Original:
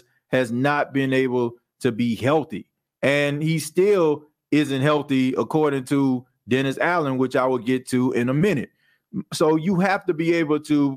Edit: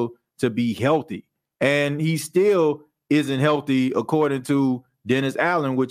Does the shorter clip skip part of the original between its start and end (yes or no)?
no